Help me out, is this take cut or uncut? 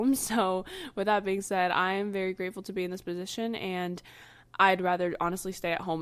uncut